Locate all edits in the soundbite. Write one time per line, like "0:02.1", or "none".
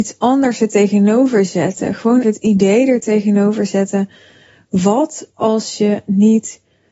0:02.2